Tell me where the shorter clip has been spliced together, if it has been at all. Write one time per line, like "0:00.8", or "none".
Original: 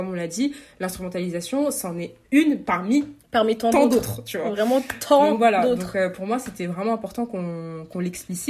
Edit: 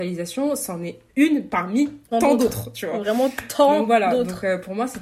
0:02.1